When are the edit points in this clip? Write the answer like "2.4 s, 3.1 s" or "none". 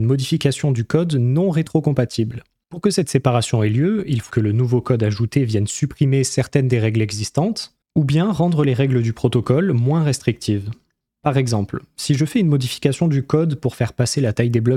4.3 s